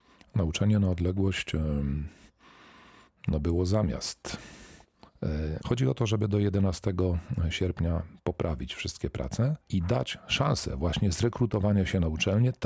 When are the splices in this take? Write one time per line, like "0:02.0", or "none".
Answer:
0:05.6
0:09.6